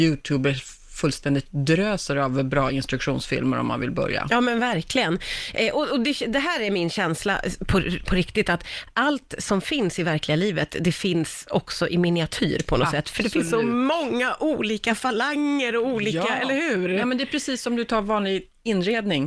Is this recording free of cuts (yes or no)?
yes